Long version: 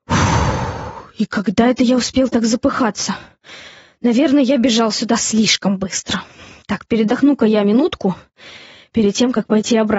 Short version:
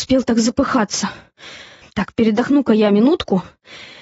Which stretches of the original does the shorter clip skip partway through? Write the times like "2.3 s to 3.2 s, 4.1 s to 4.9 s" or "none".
3.9 s to 6.5 s